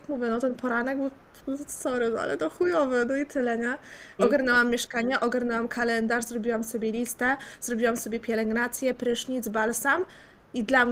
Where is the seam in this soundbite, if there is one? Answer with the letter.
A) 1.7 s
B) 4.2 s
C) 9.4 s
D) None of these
B